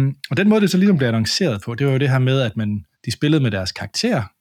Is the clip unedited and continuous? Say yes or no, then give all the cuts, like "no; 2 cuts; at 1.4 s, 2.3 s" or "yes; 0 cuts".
no; 1 cut; at 2.9 s